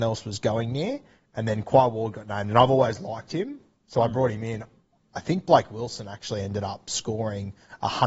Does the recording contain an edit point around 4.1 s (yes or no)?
no